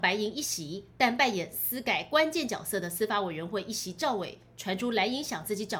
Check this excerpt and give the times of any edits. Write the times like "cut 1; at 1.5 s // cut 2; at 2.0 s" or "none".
none